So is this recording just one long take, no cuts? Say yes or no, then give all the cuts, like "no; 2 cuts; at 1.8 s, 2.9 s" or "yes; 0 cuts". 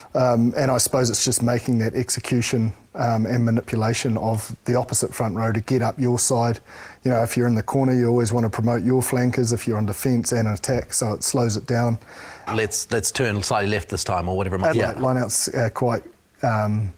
no; 2 cuts; at 12.5 s, 14.7 s